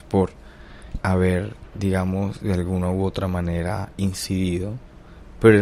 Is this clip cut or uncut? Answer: cut